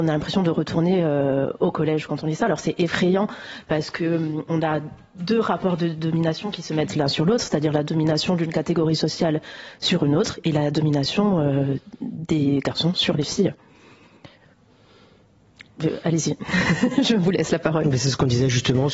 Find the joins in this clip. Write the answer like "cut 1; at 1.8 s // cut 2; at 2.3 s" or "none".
none